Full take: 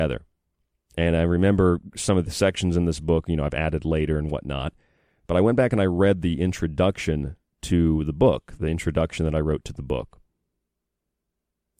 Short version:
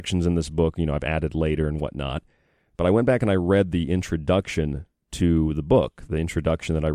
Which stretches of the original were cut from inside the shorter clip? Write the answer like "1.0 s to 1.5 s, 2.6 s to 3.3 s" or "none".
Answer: none